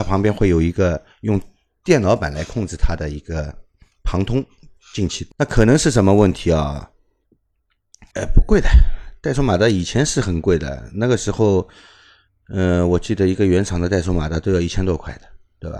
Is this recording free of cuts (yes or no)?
no